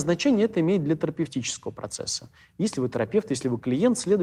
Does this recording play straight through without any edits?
yes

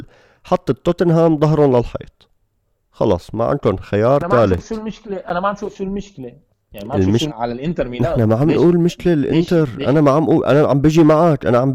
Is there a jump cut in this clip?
yes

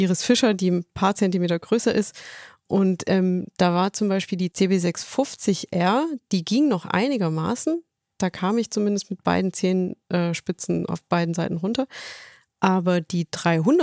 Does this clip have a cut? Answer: no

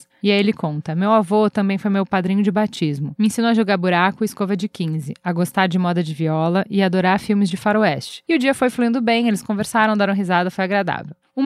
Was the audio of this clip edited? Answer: yes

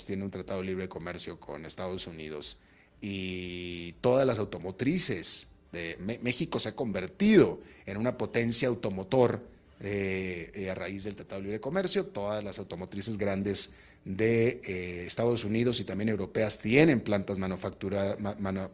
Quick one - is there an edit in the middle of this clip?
no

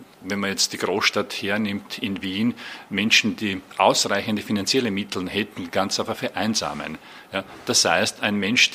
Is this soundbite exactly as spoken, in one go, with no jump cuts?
yes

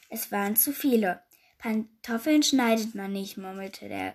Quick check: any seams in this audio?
no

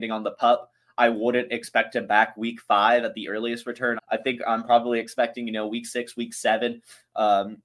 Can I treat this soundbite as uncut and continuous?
no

